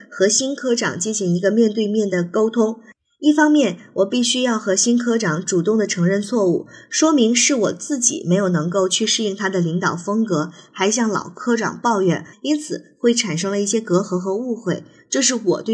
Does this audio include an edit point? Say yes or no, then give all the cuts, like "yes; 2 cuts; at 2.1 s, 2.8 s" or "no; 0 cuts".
yes; 1 cut; at 12.3 s